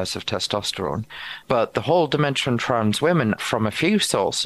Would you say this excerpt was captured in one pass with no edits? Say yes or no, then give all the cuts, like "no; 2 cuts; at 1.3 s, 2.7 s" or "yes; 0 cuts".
no; 2 cuts; at 1.4 s, 3.4 s